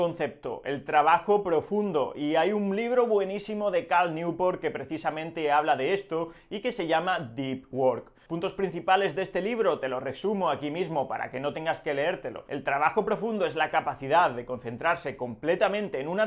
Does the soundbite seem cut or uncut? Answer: uncut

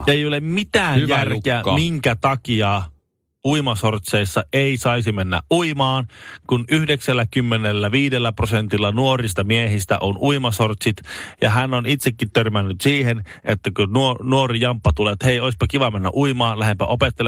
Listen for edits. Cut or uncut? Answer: uncut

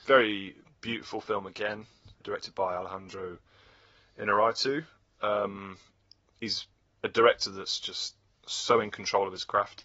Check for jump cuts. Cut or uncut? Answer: cut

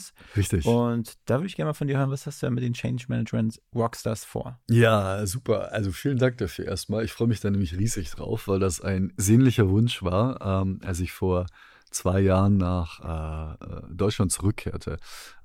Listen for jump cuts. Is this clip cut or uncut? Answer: uncut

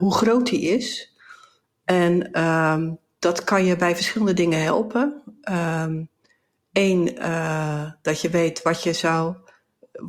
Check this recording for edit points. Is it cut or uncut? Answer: uncut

